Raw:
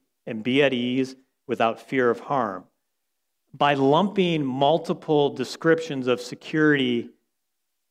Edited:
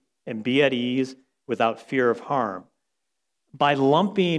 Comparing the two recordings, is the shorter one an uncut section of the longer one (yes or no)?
yes